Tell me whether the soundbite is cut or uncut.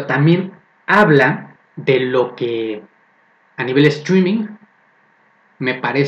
cut